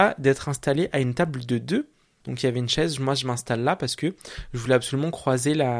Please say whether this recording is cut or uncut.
cut